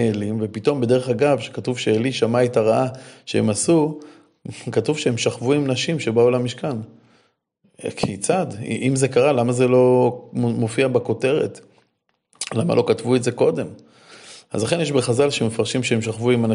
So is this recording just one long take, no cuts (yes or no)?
yes